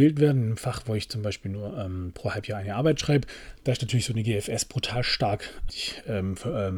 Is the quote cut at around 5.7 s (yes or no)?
yes